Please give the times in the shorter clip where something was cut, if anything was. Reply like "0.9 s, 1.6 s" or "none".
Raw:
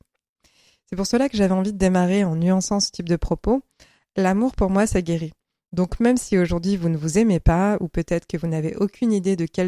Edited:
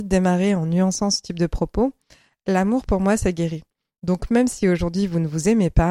none